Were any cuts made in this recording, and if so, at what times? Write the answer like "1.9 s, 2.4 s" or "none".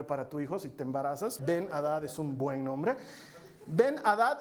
1.4 s